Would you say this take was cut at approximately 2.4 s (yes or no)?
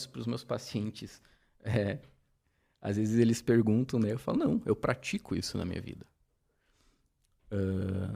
no